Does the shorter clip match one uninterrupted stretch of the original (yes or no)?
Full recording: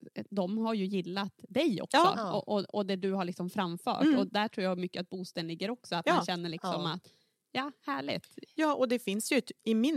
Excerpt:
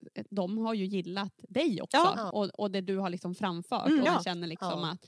no